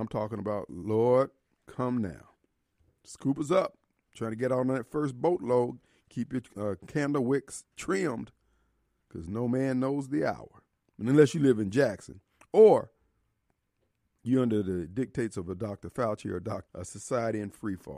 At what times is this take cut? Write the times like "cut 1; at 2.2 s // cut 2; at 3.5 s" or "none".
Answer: cut 1; at 16.7 s